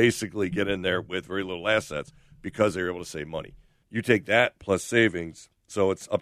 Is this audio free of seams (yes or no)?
no